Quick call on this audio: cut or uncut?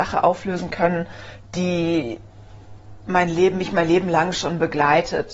uncut